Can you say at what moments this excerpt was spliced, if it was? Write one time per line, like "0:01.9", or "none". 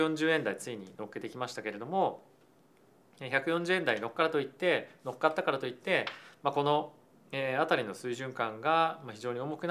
none